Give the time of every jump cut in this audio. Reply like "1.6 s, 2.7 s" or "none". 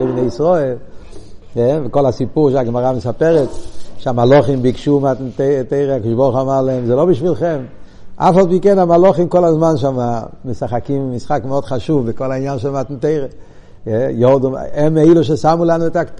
none